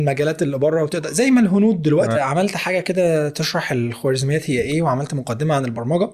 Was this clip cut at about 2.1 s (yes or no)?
yes